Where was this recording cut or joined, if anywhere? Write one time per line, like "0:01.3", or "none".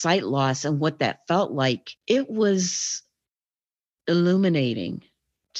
0:02.0